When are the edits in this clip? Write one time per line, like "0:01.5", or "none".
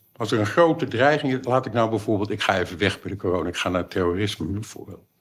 none